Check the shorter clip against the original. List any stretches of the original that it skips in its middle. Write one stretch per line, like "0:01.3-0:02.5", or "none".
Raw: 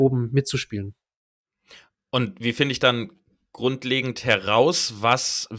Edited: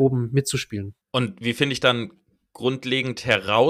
0:01.0-0:02.0